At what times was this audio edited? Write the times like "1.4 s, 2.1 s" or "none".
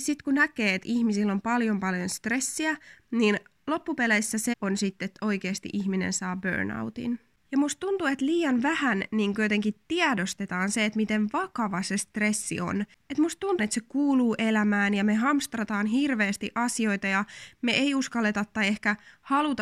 4.5 s, 13.6 s